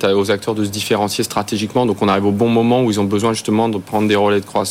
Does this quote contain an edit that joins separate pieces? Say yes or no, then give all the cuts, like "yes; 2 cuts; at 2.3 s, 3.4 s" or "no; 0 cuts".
no; 0 cuts